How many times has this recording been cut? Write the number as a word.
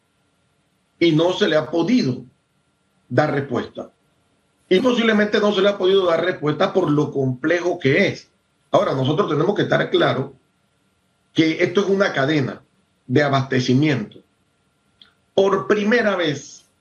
one